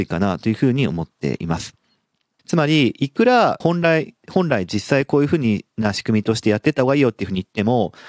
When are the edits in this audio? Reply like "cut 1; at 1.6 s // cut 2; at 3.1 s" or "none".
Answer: cut 1; at 2.4 s // cut 2; at 3.6 s